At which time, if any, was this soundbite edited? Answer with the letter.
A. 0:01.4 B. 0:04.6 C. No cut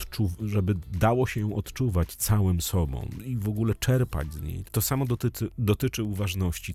B